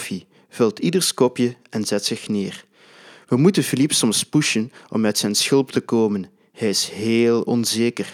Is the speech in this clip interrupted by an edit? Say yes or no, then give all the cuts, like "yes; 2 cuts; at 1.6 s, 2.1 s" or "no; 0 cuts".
no; 0 cuts